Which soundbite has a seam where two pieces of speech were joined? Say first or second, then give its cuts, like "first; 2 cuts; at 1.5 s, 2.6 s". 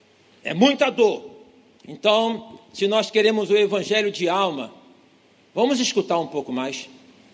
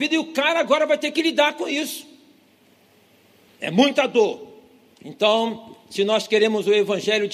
second; 1 cut; at 3.5 s